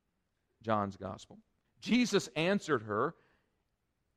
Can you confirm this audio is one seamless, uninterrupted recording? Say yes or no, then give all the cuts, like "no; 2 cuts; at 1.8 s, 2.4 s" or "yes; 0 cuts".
no; 1 cut; at 1.6 s